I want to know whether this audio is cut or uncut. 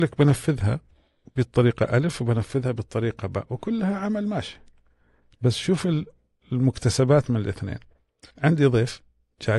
cut